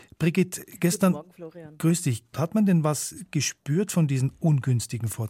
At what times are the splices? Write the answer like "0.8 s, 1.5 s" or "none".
2.3 s

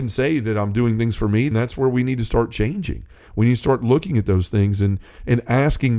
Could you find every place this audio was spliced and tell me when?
1.5 s

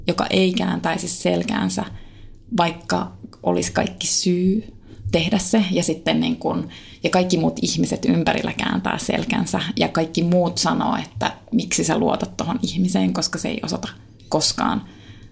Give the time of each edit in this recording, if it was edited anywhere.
none

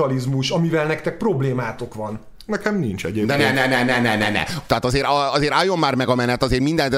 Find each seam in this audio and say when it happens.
4.7 s

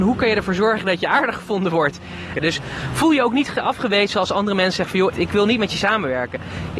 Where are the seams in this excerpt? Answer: 2.3 s, 5.1 s

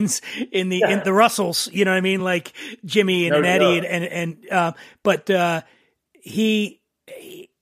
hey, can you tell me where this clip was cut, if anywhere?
none

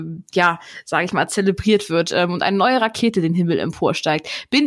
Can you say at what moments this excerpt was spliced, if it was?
none

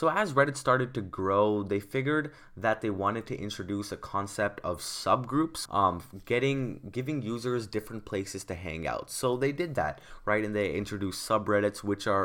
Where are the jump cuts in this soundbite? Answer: 5.7 s

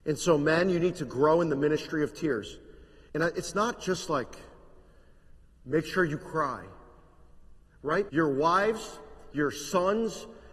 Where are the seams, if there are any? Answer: 3.1 s, 8.1 s, 9.3 s

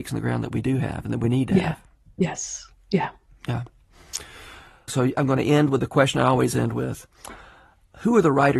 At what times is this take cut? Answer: 4.9 s

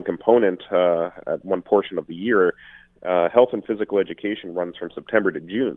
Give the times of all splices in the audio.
none

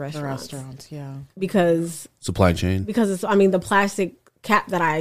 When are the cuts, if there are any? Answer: 1.3 s

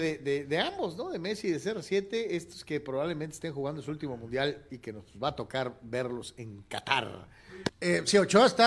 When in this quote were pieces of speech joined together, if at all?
7.7 s

